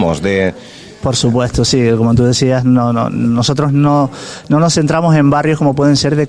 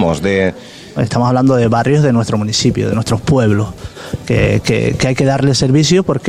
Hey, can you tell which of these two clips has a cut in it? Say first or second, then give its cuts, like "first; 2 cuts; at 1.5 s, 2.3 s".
second; 1 cut; at 1.0 s